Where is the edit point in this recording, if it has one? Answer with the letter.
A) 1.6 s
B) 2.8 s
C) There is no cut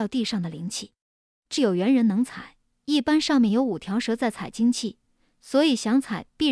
A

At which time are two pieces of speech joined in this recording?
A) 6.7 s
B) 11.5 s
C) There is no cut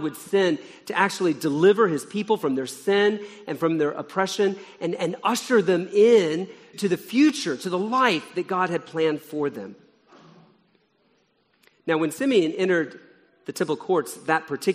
A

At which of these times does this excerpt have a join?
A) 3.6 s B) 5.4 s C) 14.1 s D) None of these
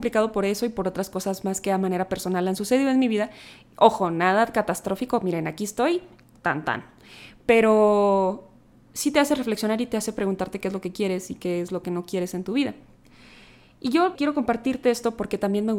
C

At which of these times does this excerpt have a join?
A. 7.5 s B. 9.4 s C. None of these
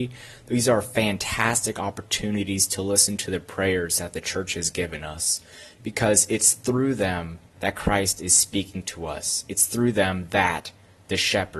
A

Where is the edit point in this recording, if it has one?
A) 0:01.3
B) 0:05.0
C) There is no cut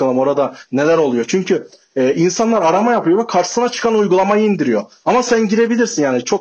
B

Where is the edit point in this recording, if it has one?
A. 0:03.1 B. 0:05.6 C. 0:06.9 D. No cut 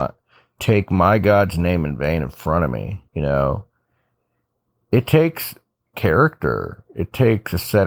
A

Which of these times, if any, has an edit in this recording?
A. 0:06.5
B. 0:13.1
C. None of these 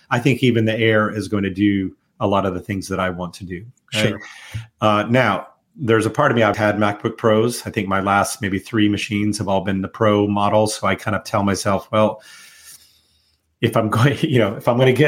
A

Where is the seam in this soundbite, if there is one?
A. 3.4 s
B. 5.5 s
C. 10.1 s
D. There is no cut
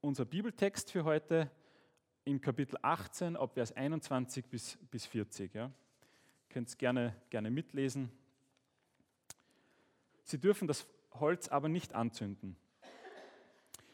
C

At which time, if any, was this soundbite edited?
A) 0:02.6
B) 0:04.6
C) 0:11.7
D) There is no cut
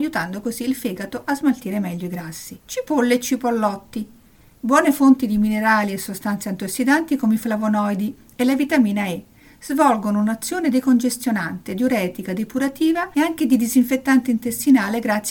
A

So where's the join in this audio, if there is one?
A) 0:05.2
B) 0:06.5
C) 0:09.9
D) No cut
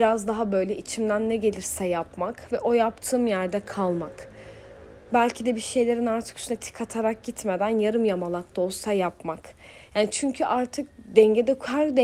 D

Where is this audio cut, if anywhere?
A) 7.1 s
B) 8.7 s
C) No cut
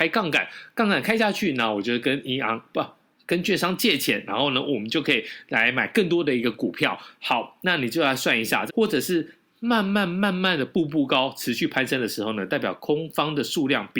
B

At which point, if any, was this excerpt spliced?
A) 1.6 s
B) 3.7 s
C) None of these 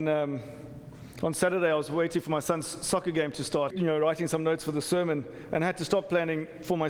B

